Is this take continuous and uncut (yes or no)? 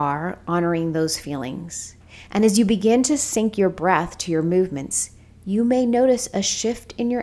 yes